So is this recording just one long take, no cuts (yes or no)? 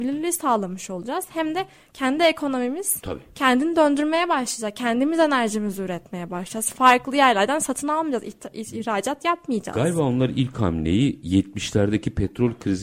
yes